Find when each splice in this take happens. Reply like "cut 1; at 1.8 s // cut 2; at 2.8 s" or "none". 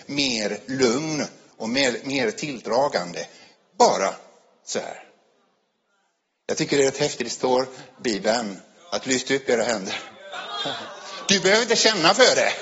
none